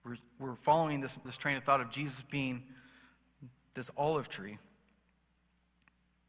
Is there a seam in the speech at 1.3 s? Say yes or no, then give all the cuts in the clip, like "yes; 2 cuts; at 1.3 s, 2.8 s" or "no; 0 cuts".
yes; 1 cut; at 1.3 s